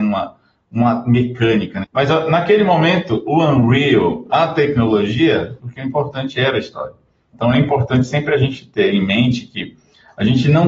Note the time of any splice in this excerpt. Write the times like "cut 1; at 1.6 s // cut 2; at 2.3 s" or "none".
cut 1; at 1.8 s // cut 2; at 5.6 s // cut 3; at 7.3 s